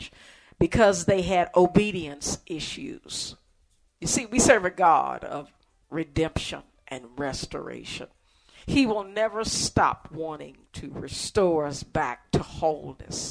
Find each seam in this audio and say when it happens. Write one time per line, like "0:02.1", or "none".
0:03.9